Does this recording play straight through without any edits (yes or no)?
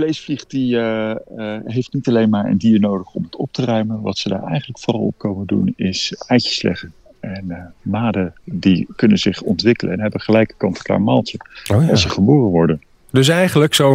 yes